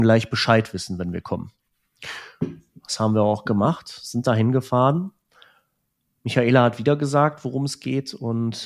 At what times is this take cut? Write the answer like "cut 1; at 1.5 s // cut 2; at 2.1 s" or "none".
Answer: none